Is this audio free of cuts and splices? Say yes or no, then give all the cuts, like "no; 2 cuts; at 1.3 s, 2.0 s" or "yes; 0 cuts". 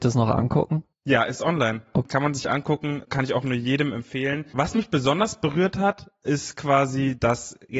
yes; 0 cuts